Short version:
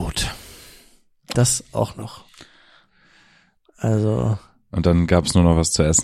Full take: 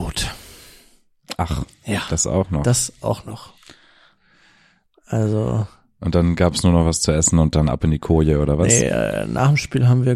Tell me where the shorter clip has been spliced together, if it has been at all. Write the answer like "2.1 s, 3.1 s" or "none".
1.3 s